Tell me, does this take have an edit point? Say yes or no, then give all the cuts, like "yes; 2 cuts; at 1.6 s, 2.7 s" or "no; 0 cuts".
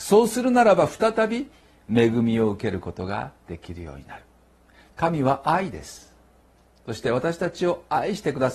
no; 0 cuts